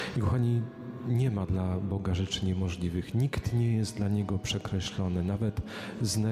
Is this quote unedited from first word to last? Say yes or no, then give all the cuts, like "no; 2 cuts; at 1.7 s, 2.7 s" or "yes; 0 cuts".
yes; 0 cuts